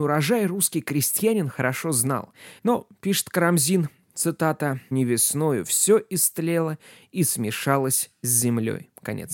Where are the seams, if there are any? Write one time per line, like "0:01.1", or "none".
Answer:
0:02.6
0:04.9